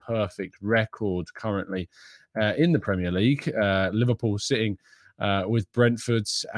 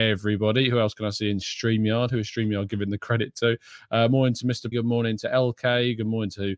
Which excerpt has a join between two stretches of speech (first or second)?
second